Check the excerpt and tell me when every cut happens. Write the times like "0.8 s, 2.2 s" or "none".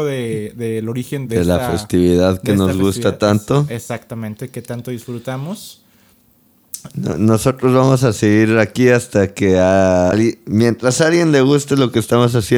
1.3 s, 6.9 s, 10.1 s